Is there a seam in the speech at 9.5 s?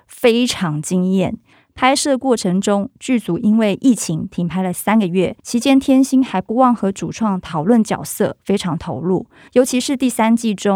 yes; 3 cuts; at 1.5 s, 5.4 s, 9.5 s

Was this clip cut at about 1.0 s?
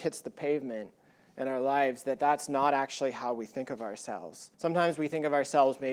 no; 1 cut; at 4.5 s

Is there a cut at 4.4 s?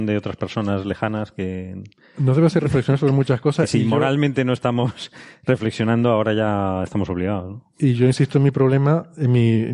no; 0 cuts

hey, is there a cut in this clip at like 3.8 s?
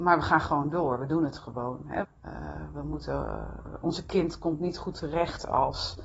no; 1 cut; at 2.0 s

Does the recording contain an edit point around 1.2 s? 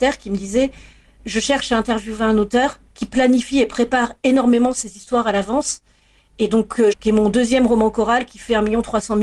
no; 2 cuts; at 2.9 s, 6.9 s

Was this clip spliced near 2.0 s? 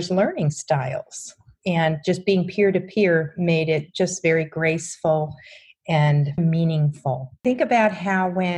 no; 1 cut; at 6.4 s

